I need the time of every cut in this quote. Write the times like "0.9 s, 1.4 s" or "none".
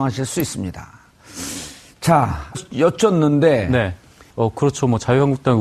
2.5 s, 4.3 s